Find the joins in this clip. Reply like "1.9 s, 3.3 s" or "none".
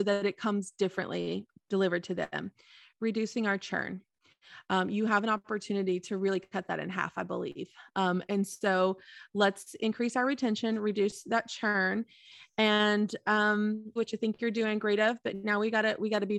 14.0 s